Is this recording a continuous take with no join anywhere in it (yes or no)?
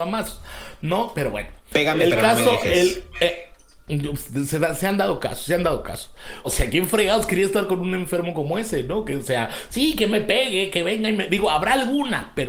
no